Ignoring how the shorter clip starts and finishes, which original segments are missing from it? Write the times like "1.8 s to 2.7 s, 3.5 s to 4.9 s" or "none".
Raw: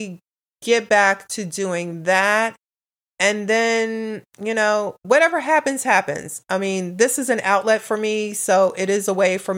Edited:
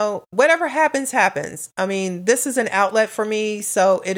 none